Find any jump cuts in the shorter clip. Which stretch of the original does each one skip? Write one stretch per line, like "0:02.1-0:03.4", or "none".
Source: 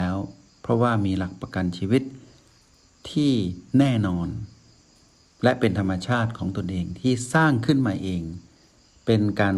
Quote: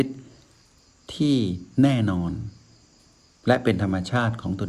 none